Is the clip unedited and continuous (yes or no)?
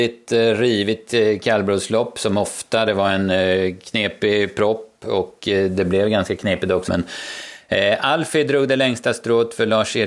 no